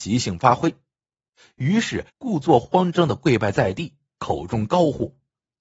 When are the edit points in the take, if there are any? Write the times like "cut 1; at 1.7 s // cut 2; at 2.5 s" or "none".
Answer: cut 1; at 2.1 s